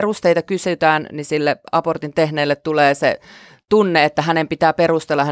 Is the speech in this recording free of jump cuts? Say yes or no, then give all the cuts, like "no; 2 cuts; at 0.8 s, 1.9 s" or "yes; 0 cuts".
yes; 0 cuts